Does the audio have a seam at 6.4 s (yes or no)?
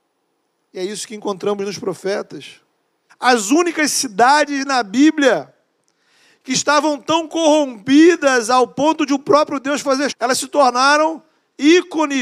no